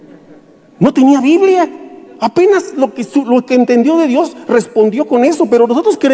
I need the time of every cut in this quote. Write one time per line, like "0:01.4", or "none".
none